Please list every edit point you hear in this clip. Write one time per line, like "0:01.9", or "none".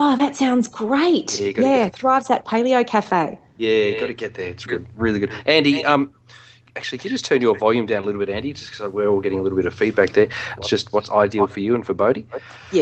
0:04.7
0:10.6